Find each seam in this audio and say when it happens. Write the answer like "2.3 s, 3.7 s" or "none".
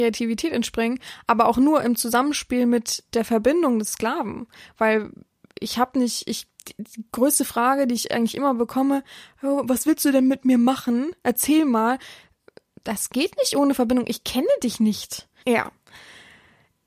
15.4 s